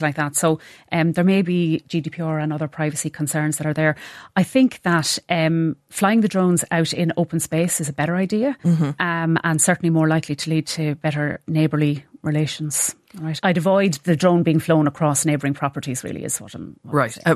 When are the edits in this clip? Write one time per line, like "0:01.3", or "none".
0:13.4